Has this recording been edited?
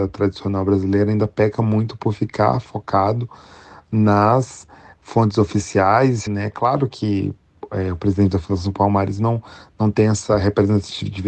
yes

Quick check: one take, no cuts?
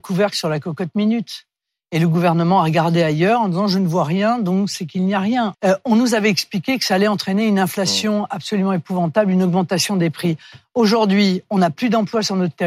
no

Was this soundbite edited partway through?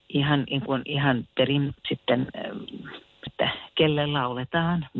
yes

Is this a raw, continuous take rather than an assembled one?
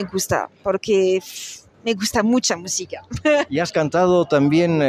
yes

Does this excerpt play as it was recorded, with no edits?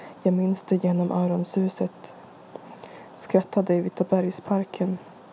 no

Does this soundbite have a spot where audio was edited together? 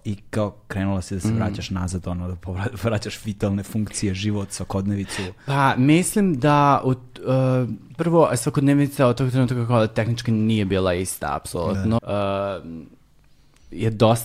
yes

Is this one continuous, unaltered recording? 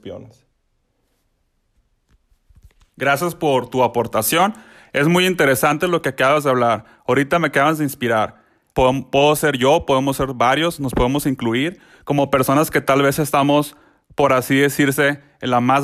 no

